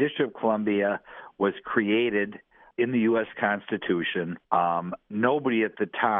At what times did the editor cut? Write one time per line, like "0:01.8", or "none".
0:02.7
0:04.4